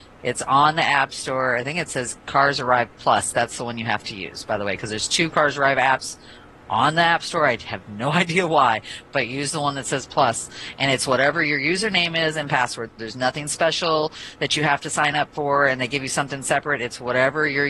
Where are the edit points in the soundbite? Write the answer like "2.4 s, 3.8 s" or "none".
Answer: none